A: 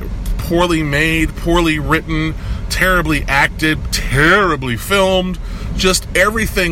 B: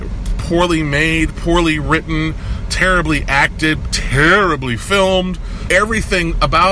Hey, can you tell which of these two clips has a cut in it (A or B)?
B